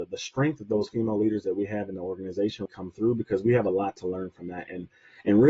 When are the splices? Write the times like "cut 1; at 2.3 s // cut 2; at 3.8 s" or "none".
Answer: cut 1; at 2.7 s